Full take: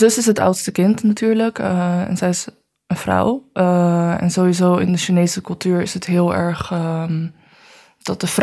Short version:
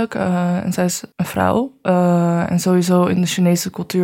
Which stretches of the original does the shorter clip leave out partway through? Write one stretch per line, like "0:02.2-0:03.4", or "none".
0:02.6-0:02.8